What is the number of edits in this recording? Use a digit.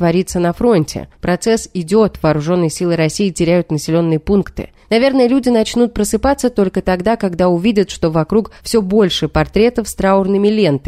0